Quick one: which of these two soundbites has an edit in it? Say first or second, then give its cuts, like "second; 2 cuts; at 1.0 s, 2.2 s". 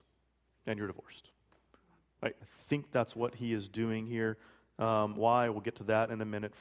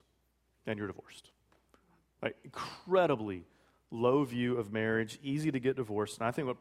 first; 1 cut; at 2.4 s